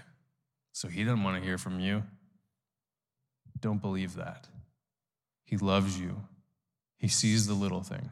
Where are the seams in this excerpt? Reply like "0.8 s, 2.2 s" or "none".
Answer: 6.8 s